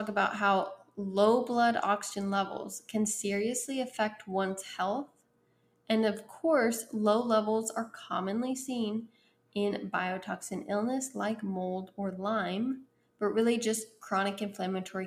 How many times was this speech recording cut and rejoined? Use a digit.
0